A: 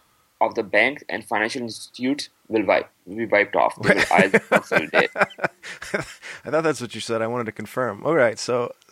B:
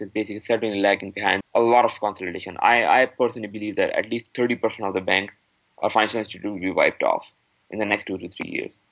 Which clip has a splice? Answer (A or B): B